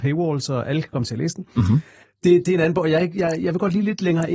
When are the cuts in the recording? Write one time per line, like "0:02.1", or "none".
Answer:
0:02.0